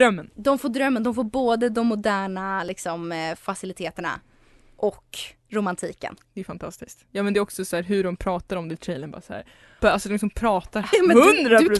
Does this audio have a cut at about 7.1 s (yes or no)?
no